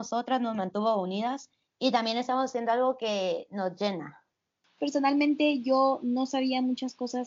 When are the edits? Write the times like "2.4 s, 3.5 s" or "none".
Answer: 4.8 s